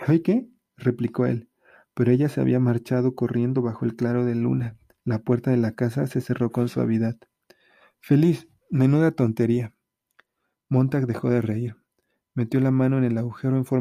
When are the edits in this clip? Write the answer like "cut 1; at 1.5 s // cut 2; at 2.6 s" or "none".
none